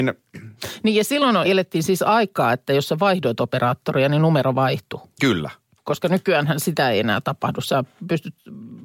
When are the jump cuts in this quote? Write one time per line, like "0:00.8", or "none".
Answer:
0:01.4